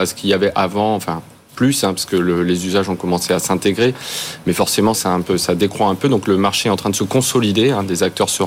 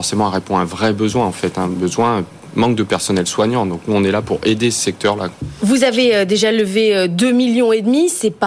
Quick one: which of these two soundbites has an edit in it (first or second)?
first